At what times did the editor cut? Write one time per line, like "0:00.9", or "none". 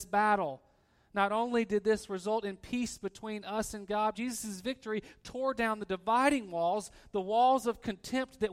0:04.1